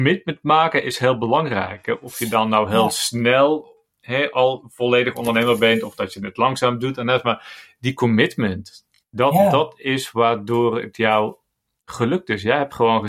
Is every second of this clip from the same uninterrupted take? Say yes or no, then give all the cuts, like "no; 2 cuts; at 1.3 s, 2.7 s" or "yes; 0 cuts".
yes; 0 cuts